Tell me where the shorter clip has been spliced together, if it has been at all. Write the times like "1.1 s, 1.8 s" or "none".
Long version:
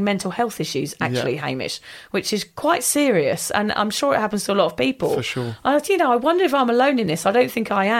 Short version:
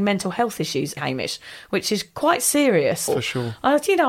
1.0 s, 3.1 s